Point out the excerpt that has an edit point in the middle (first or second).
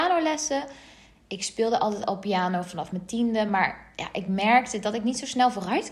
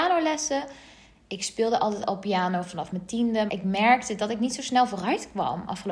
second